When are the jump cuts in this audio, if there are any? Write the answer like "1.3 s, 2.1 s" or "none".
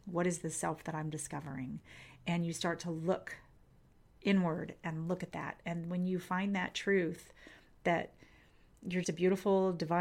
9.0 s